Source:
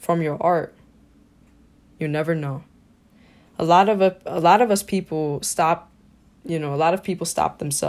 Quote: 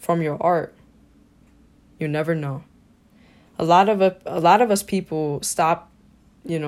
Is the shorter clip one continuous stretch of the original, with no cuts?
yes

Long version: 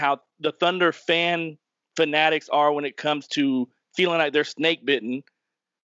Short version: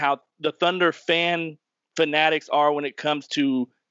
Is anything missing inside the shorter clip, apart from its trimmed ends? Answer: no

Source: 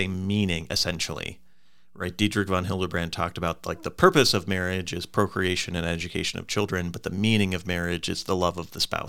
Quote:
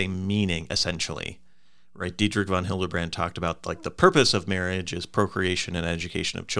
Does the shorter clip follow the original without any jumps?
yes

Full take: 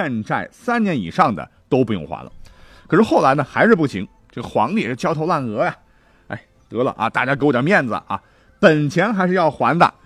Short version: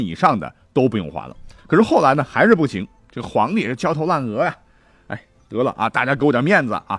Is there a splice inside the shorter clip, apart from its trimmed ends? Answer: yes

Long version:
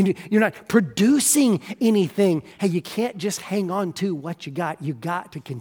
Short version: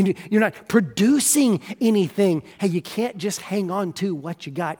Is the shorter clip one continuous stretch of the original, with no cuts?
yes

